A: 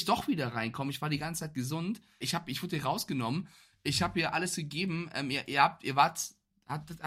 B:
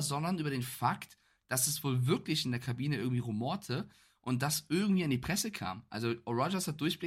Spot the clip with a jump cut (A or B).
A